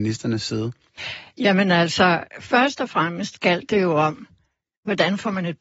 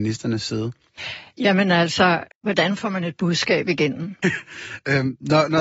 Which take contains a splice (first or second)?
second